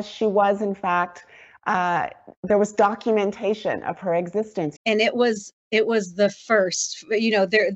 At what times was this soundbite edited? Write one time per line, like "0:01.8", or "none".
0:04.8